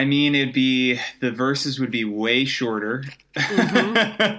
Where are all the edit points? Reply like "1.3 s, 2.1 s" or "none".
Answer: none